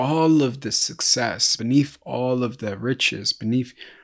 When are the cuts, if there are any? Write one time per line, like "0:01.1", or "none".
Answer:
0:01.6